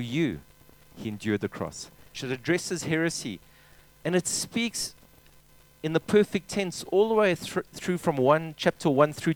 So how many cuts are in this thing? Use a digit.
1